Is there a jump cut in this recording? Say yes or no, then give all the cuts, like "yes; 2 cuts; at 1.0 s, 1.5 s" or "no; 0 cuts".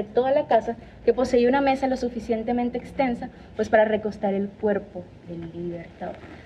no; 0 cuts